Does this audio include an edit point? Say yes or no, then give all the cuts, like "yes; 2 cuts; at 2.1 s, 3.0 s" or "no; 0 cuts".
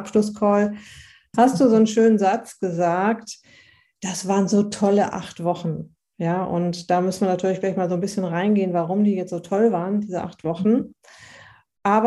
no; 0 cuts